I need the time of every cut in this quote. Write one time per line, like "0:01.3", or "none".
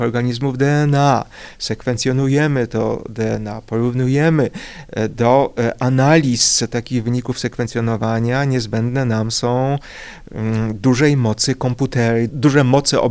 none